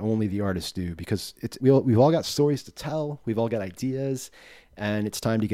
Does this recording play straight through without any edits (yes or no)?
no